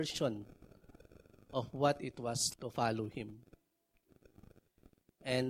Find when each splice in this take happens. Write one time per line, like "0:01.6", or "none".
0:02.5

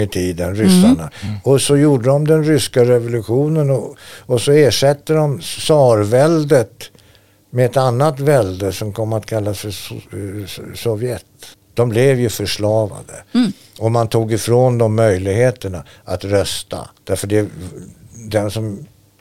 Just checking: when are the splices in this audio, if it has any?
none

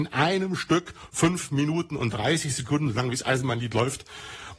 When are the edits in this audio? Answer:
none

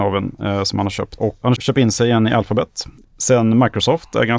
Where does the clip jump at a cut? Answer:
0:03.0

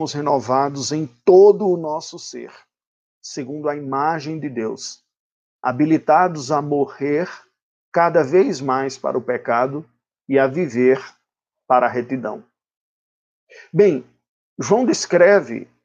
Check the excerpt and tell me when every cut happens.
none

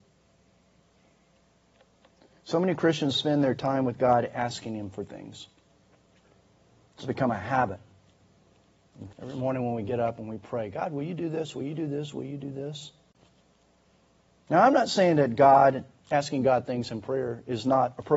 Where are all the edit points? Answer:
0:09.1

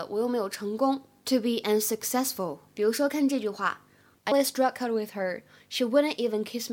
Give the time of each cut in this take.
0:04.3

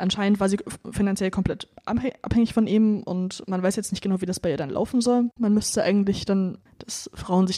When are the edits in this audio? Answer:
0:05.4
0:06.7

